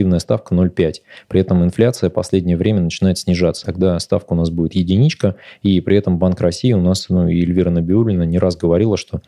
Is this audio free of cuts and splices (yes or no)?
no